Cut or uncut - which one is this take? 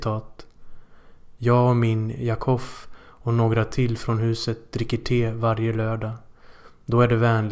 cut